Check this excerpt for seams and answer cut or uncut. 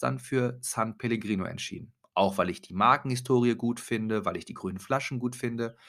uncut